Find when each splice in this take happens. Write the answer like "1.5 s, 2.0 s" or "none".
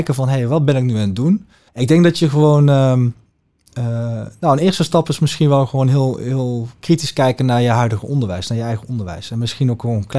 1.7 s